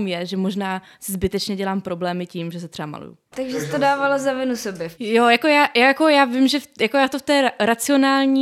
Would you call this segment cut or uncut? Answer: cut